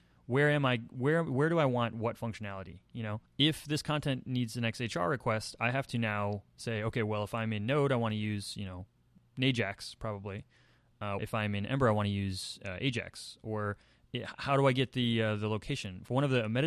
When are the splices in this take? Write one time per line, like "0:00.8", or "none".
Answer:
0:03.3
0:11.2